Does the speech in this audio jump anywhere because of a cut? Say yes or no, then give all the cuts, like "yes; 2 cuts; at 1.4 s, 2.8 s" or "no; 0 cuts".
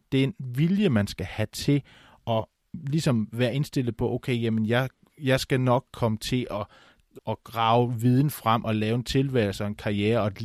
yes; 1 cut; at 7.2 s